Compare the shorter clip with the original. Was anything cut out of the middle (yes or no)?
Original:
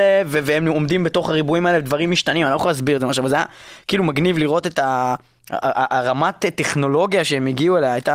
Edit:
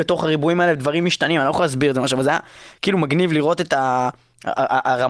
no